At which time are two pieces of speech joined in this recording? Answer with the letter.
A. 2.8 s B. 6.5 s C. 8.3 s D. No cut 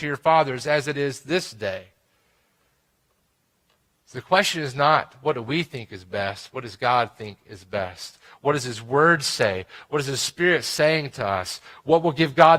D